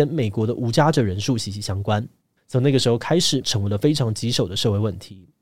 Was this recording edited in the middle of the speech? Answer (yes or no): yes